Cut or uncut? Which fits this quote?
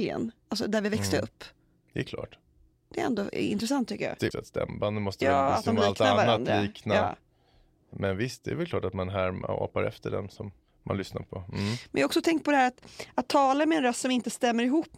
cut